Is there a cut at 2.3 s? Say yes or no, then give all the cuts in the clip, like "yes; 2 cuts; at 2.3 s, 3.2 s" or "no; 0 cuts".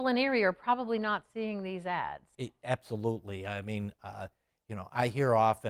yes; 1 cut; at 2.3 s